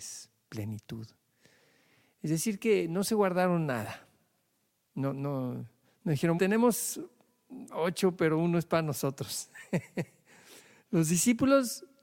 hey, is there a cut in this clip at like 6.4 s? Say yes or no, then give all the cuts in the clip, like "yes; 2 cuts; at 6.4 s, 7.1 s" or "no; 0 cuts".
yes; 1 cut; at 6.4 s